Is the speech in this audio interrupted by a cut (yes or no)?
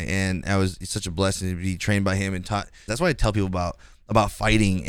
yes